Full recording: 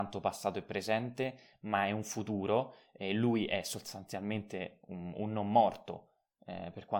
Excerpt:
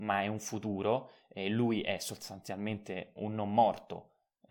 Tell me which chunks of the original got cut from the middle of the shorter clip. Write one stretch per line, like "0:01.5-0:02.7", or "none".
0:04.8-0:05.1